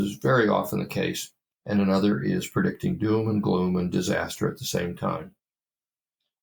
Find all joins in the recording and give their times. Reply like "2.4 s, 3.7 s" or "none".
1.5 s